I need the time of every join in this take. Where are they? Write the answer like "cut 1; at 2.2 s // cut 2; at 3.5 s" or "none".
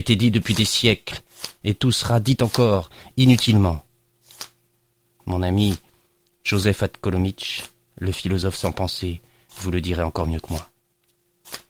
none